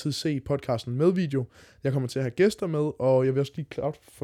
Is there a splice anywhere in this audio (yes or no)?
no